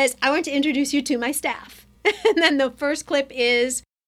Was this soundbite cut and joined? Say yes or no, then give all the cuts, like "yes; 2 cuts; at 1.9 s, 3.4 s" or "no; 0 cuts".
no; 0 cuts